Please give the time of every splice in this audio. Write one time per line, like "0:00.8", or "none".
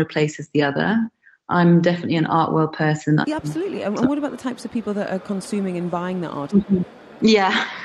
0:03.2
0:06.5